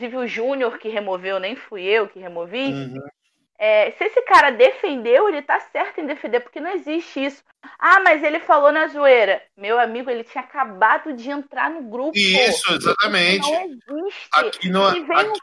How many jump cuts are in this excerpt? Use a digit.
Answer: 0